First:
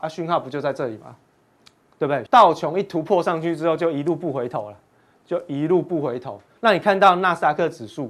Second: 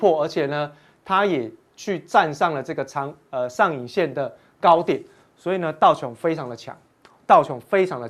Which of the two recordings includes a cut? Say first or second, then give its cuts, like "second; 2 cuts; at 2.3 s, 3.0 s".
first; 2 cuts; at 2.3 s, 6.6 s